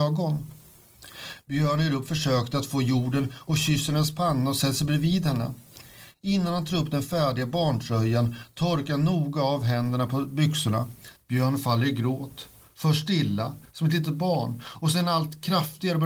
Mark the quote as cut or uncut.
cut